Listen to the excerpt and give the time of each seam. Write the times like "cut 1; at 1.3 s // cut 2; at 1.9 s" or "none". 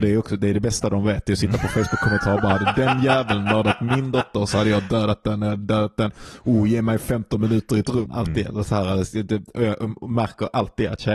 cut 1; at 8.1 s